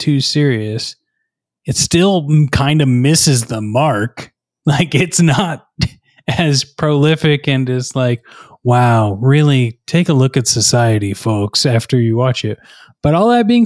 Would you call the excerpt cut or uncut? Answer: uncut